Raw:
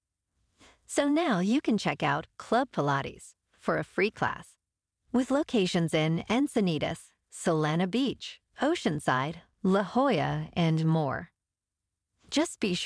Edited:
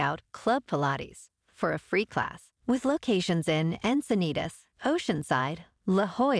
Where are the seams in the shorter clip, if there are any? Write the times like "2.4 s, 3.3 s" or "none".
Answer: 2.6 s, 4.7 s